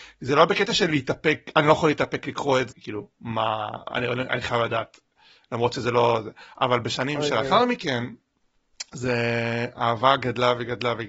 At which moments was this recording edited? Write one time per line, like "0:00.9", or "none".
0:02.7